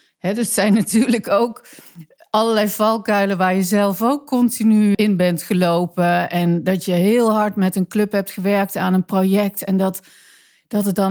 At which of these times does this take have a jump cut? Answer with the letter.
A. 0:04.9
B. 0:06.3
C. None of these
A